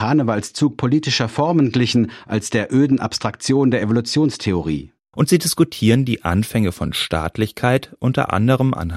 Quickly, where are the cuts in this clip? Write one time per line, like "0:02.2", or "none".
0:05.1

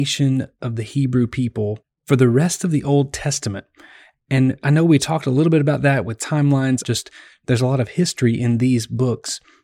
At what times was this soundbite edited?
0:06.8

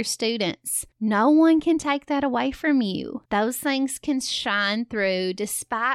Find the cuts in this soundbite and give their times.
0:03.3

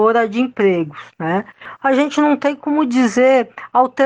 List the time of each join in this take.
none

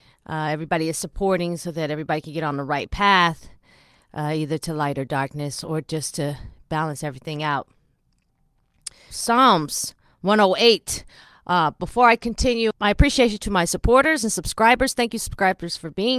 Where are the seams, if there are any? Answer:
0:09.1
0:12.7

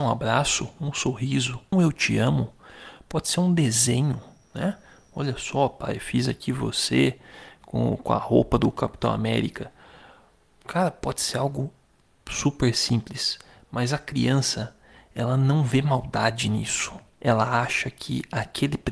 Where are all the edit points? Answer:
0:01.7

